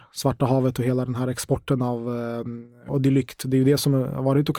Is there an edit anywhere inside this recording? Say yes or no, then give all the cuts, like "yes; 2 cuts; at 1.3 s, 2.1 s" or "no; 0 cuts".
yes; 1 cut; at 2.9 s